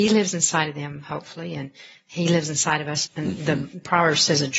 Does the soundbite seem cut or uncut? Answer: cut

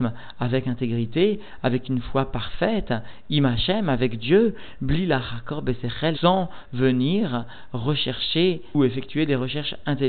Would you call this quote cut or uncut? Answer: cut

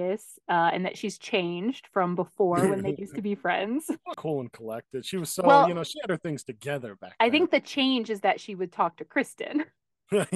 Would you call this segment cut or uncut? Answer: cut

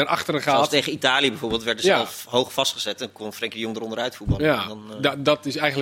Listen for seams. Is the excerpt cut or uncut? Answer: uncut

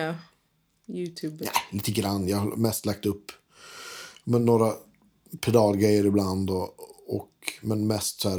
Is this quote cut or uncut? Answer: uncut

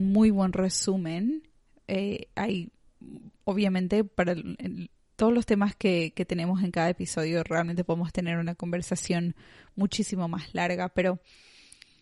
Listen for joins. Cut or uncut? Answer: uncut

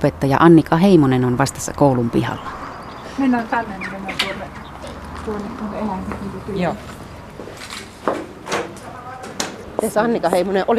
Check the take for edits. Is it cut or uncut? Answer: uncut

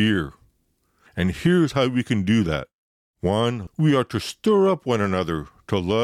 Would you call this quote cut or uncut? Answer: cut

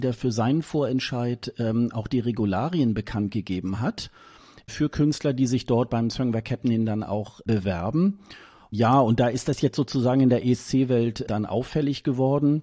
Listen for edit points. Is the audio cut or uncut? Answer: uncut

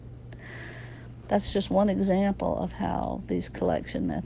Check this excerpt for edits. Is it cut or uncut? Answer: cut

